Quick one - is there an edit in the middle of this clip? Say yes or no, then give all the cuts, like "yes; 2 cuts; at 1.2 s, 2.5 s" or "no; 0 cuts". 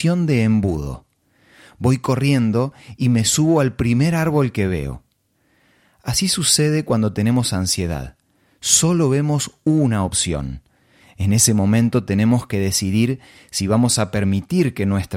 yes; 1 cut; at 11.0 s